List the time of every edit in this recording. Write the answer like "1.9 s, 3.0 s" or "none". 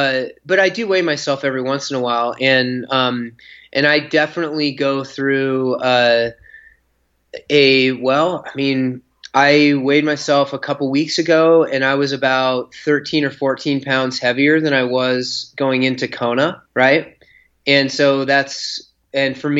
16.7 s